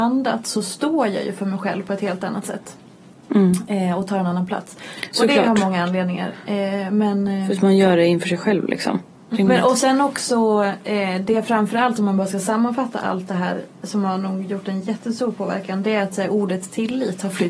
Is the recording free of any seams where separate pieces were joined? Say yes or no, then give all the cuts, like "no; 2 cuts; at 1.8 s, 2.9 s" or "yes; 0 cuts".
no; 1 cut; at 9.3 s